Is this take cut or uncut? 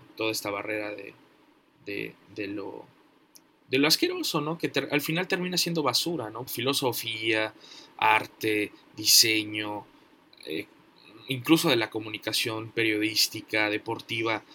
cut